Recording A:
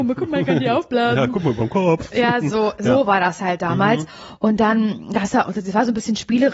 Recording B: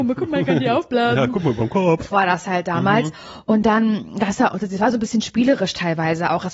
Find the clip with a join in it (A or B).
B